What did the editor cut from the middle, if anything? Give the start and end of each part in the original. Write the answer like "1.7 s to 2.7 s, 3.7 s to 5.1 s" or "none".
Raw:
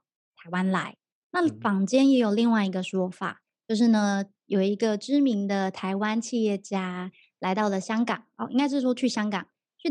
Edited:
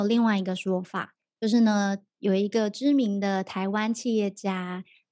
none